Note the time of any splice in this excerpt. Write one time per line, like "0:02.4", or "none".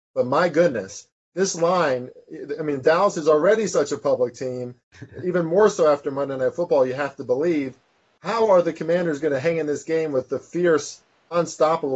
none